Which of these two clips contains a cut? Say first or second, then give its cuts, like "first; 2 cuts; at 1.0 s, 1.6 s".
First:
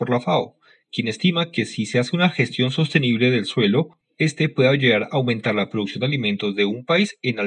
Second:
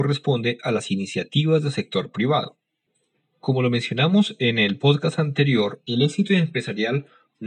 second; 1 cut; at 5.9 s